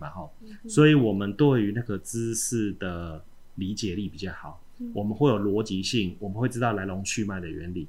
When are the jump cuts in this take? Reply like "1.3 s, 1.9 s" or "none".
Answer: none